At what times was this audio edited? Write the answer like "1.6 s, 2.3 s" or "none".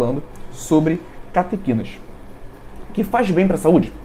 none

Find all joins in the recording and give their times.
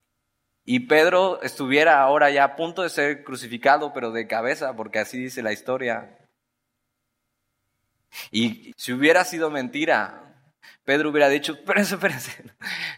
8.7 s

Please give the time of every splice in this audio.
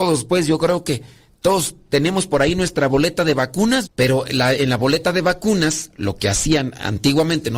3.8 s

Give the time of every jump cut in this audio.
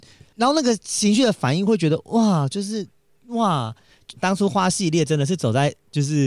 4.2 s

